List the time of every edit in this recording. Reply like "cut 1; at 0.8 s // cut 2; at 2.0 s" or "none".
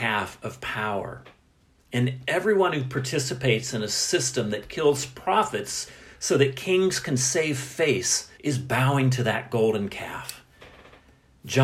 cut 1; at 8.3 s

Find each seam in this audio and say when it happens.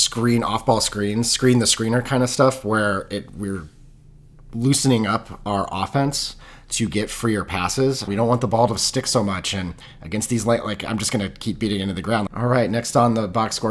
cut 1; at 8.1 s // cut 2; at 12.3 s

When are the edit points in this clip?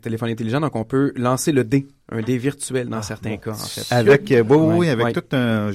none

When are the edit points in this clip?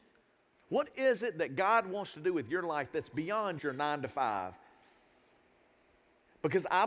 cut 1; at 3.6 s

